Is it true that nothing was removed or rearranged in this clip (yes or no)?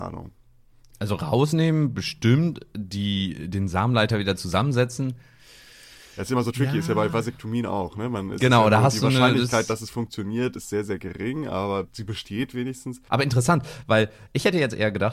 no